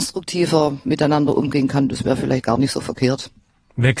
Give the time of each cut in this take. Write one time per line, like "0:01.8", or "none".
none